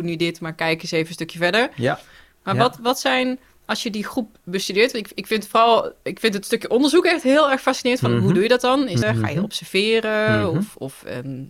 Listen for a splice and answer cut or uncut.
cut